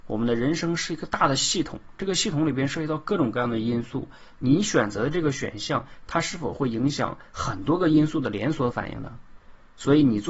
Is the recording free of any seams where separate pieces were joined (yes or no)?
yes